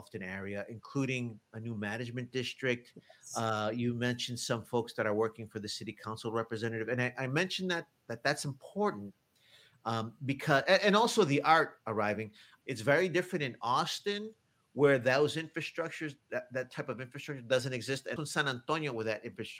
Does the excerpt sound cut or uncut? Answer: cut